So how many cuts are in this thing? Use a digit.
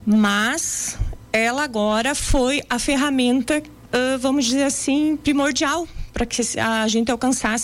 0